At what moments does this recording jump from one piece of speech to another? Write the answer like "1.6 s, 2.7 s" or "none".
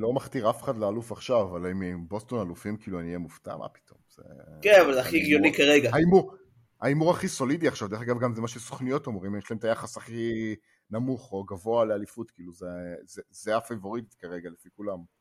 none